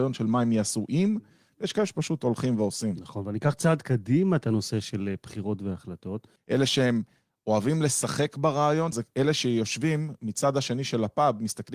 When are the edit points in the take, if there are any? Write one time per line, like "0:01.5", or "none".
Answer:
0:06.4
0:08.9